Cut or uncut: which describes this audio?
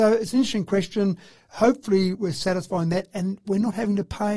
uncut